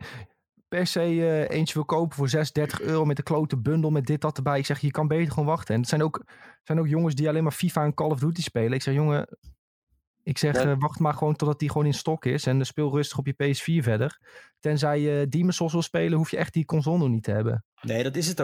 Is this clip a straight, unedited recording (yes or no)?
yes